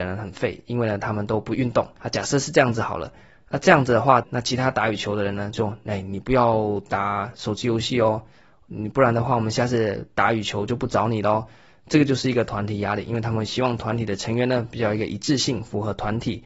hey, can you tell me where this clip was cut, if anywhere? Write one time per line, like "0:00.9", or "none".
0:02.0
0:04.2
0:05.5